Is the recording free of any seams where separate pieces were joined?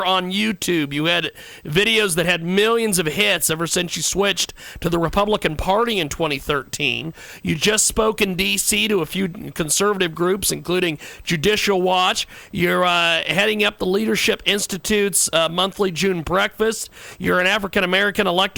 yes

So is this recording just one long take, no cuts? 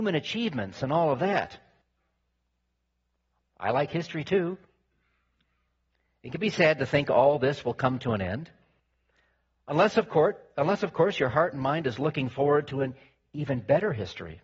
yes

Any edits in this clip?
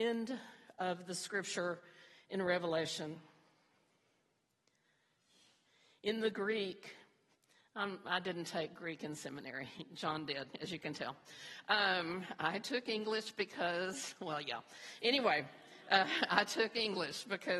no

